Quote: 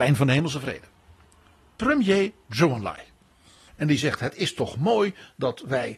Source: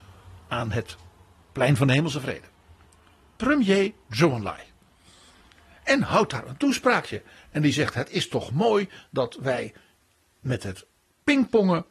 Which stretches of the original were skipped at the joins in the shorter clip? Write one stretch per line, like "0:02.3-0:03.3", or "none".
0:05.3-0:07.4